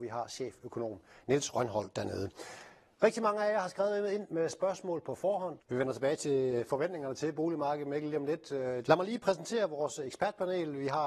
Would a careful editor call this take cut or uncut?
cut